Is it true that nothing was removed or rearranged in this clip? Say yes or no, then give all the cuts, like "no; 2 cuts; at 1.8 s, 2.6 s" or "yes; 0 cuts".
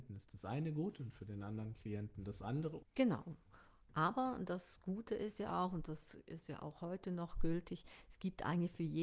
no; 1 cut; at 2.8 s